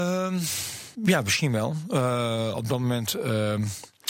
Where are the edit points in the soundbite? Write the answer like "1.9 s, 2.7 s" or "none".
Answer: 0.9 s

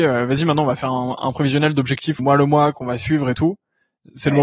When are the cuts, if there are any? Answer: 2.2 s

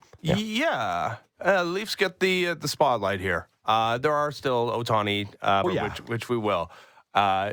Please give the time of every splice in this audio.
5.6 s

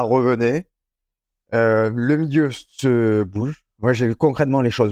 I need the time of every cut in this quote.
none

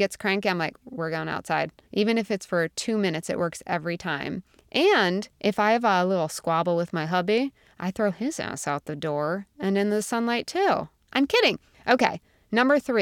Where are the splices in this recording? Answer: 1.8 s, 11.1 s

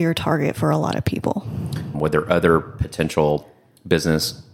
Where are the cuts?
1.9 s

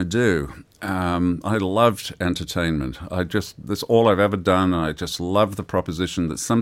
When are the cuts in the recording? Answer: none

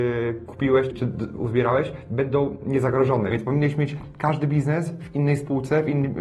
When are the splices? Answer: 0.9 s, 3.3 s

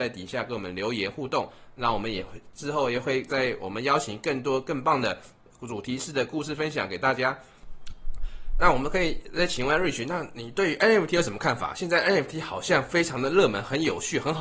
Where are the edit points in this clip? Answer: none

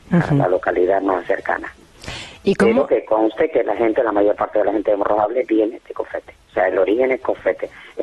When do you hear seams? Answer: none

